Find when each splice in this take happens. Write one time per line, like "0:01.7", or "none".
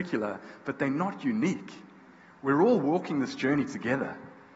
none